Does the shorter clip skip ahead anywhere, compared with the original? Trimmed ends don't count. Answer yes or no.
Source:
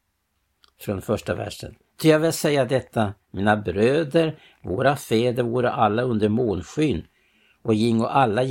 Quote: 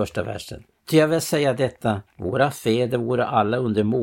yes